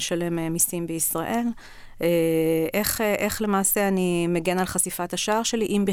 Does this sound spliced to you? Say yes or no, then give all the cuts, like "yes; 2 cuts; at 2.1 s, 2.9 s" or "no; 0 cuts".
no; 0 cuts